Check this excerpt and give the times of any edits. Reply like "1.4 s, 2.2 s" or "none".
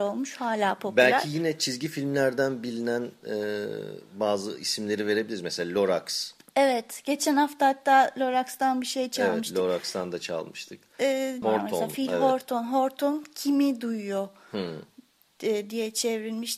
11.4 s